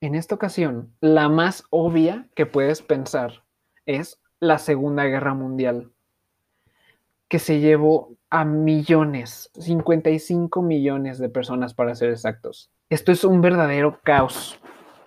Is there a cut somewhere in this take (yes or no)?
yes